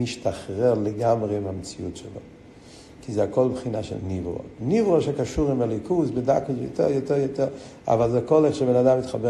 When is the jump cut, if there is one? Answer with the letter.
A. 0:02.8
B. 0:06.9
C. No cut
C